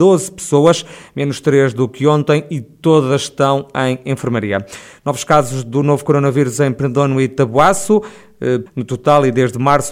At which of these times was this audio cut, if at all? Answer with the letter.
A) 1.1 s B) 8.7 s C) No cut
B